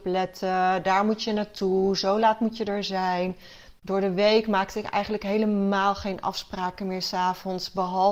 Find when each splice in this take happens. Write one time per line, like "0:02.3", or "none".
0:03.8